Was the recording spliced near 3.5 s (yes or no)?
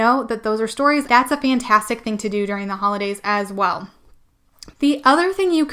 no